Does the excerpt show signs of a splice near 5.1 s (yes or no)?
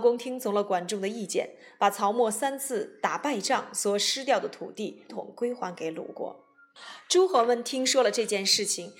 yes